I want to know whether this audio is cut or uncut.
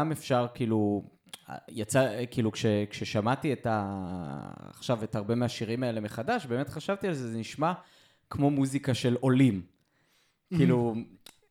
uncut